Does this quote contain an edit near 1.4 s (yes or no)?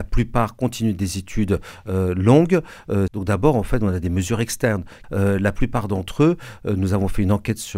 no